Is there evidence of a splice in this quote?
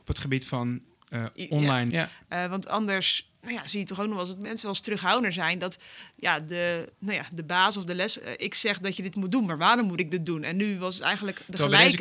yes; 1 cut; at 1.9 s

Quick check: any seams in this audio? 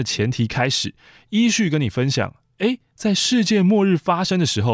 no; 0 cuts

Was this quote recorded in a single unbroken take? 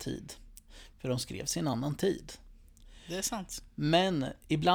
yes; 0 cuts

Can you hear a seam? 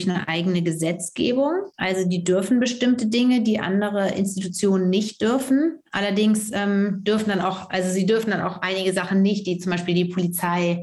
no; 0 cuts

